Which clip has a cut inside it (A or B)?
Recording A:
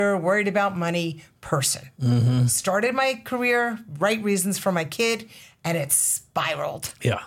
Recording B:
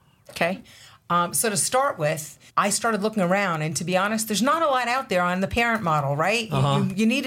B